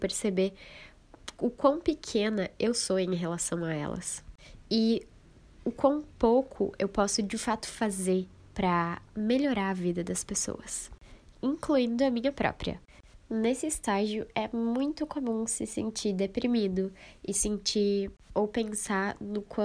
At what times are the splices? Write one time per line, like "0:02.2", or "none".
none